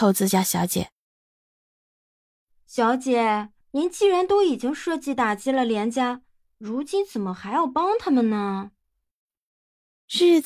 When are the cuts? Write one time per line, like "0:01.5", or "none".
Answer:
none